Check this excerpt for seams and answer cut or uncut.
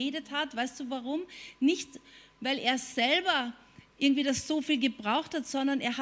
uncut